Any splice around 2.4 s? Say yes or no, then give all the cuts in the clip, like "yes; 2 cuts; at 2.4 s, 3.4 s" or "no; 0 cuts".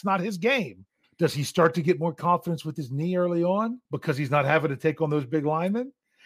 no; 2 cuts; at 1.0 s, 3.8 s